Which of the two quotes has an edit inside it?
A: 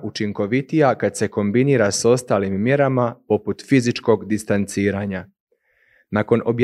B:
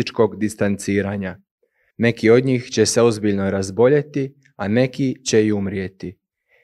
B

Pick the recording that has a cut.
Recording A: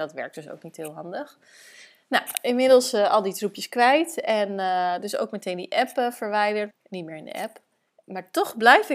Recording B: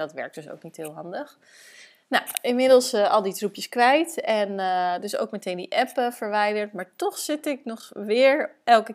A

